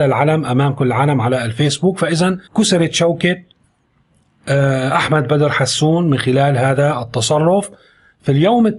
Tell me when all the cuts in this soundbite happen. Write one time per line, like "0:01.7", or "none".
0:02.5